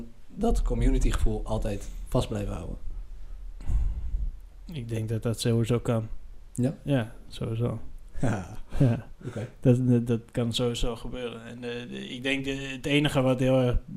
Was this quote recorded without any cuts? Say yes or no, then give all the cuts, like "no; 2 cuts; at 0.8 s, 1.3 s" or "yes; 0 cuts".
yes; 0 cuts